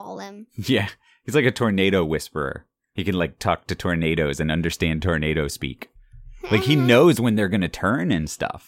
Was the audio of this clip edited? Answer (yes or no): no